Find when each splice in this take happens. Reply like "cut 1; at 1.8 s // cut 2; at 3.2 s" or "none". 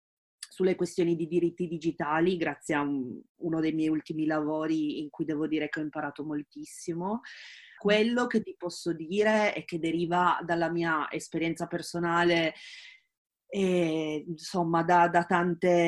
cut 1; at 7.8 s